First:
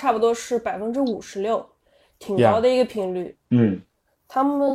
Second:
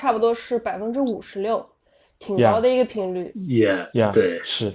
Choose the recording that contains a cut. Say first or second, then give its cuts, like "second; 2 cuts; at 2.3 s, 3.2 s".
first; 1 cut; at 3.3 s